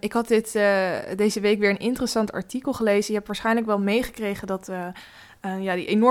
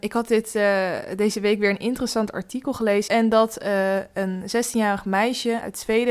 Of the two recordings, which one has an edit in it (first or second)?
second